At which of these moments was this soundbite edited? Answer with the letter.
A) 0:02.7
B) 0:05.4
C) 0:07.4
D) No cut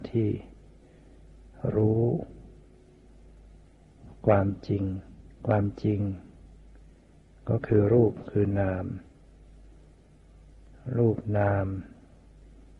B